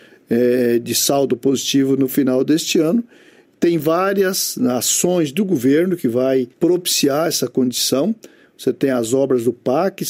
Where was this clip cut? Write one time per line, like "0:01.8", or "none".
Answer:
0:06.5